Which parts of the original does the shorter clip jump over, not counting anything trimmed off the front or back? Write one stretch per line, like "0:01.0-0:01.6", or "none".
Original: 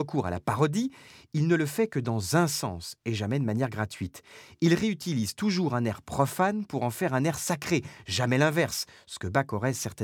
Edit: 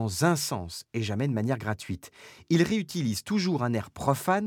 none